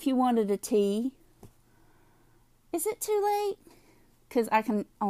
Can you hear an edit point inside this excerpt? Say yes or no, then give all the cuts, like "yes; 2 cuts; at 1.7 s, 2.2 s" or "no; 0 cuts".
no; 0 cuts